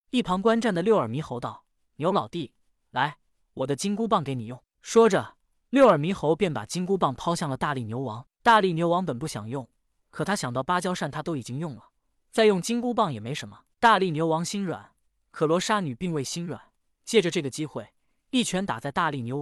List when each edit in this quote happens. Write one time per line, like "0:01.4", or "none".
0:13.7